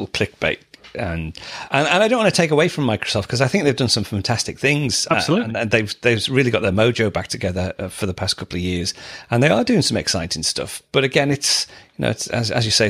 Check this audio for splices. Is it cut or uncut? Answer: uncut